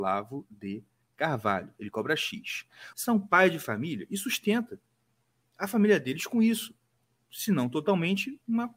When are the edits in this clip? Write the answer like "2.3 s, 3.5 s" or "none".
2.9 s

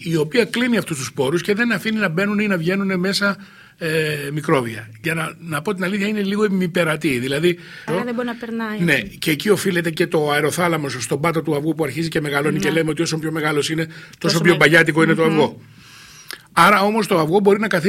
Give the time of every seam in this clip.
7.9 s

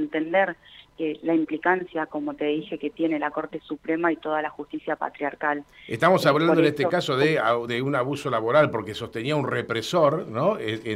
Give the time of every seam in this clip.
none

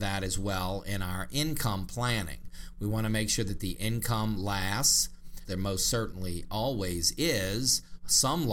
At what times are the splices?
5.5 s

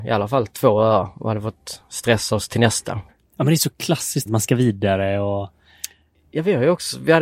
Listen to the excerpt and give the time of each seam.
3.1 s, 4.3 s

